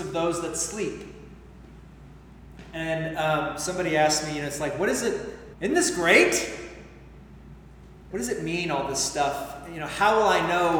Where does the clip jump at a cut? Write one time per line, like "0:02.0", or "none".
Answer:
0:05.5
0:08.1

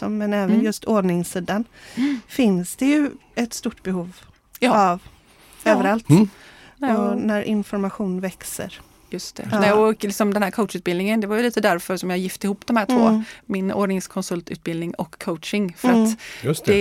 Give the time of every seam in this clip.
none

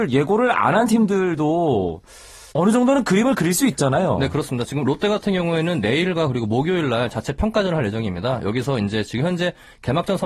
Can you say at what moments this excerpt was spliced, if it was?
0:02.5

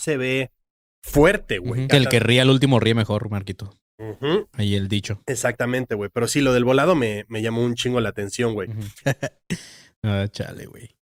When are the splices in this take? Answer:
0:01.9
0:09.0

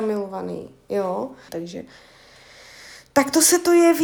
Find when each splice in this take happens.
0:01.5

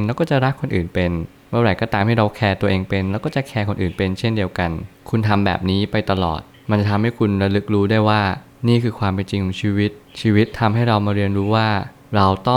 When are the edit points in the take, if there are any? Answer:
none

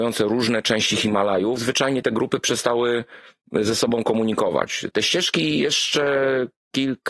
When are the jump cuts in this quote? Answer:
0:01.6
0:04.9

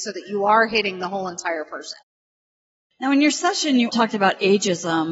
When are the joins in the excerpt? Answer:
0:03.9

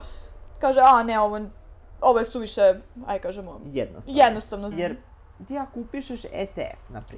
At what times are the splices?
0:04.7

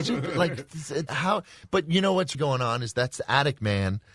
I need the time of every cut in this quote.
0:01.1
0:02.3

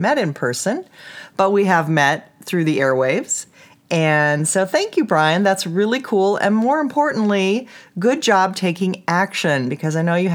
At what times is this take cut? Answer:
none

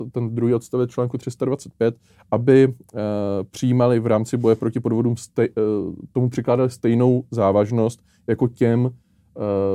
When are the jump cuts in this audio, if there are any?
none

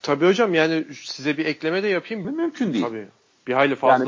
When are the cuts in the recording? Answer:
0:02.2

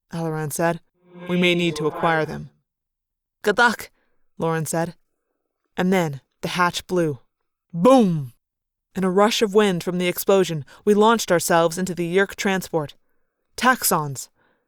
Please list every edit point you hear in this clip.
none

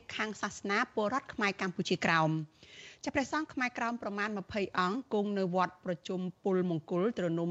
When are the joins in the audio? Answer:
none

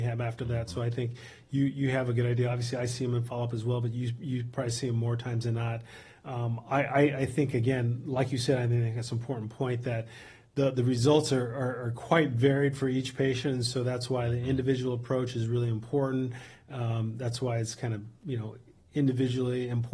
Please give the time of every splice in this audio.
none

